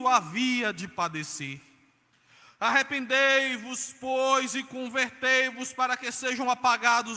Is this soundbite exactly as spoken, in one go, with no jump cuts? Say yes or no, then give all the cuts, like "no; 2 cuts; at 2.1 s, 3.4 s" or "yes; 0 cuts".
yes; 0 cuts